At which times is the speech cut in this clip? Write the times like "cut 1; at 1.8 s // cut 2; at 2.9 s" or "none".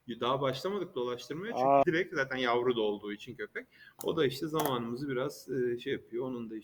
cut 1; at 1.8 s // cut 2; at 4.0 s